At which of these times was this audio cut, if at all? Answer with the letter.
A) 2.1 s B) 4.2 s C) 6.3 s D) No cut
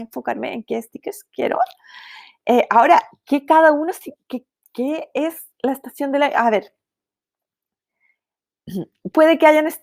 D